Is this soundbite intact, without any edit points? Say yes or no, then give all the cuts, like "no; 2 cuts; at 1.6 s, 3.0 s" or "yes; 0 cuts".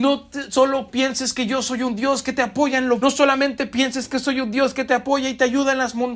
no; 1 cut; at 3.0 s